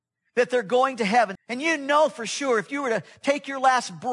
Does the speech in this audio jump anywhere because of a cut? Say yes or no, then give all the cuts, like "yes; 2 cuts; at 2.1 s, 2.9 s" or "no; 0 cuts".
yes; 1 cut; at 1.4 s